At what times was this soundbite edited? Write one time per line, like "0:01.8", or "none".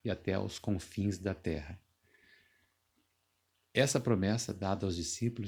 none